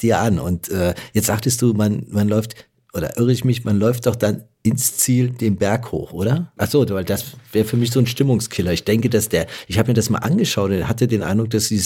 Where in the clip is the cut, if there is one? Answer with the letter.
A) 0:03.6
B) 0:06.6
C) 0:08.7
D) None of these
B